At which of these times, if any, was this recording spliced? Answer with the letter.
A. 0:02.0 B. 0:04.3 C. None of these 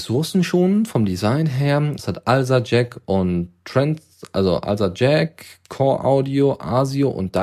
A